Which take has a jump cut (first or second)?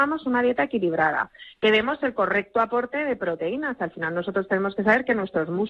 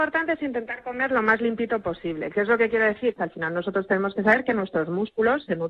second